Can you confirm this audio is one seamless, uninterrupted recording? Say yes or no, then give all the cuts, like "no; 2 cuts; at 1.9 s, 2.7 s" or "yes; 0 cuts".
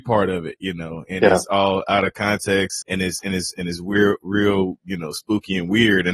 no; 1 cut; at 2.8 s